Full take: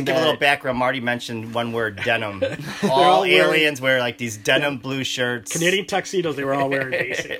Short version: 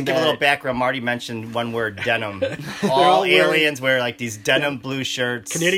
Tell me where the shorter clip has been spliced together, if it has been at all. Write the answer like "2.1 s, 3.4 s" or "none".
none